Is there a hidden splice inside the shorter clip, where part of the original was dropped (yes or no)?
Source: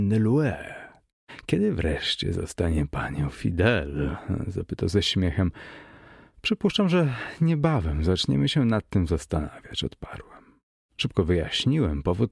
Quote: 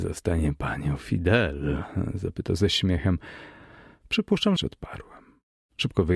yes